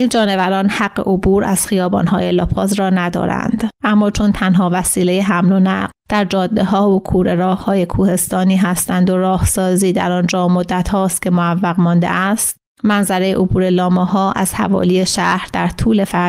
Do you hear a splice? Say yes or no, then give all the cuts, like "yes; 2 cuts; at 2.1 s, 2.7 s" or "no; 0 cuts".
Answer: no; 0 cuts